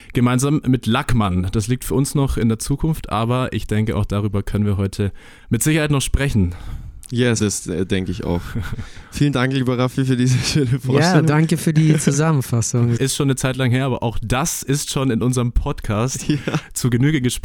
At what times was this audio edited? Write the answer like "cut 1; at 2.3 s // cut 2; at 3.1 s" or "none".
cut 1; at 7.4 s // cut 2; at 13.0 s